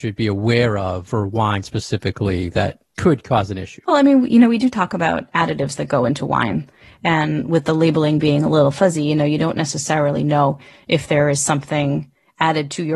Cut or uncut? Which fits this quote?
uncut